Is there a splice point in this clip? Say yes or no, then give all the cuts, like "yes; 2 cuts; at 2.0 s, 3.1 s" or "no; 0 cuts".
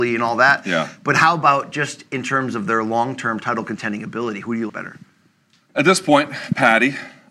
yes; 1 cut; at 4.7 s